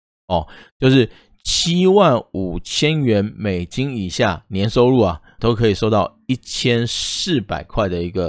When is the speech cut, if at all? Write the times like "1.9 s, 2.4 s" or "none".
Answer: 5.4 s